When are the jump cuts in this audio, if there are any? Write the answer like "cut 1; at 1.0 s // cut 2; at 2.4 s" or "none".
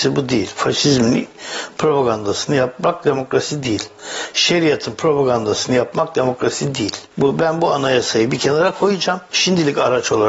cut 1; at 7.1 s